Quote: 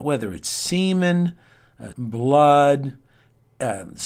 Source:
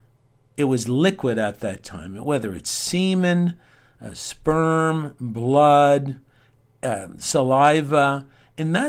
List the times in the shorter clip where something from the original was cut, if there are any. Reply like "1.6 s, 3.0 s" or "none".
1.9 s